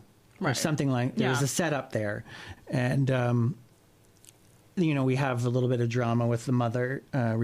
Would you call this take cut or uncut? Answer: cut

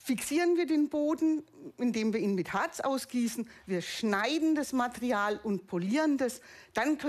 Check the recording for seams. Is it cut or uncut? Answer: uncut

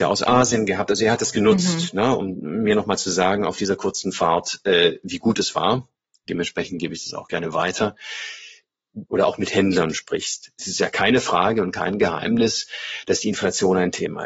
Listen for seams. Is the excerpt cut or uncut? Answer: cut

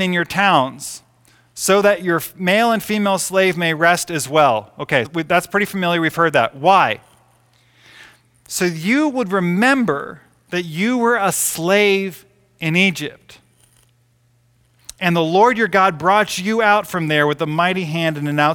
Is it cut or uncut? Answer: cut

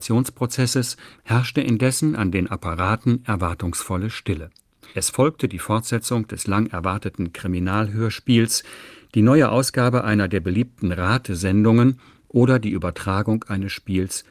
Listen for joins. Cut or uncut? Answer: cut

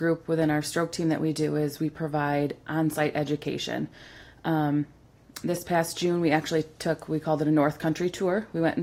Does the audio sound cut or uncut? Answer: uncut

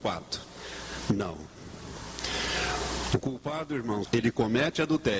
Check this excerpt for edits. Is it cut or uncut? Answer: cut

